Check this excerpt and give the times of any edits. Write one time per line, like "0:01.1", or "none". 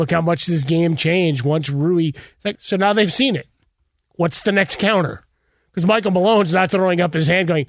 0:02.5
0:06.7